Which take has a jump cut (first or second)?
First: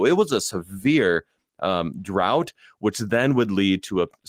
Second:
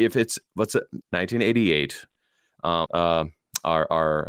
second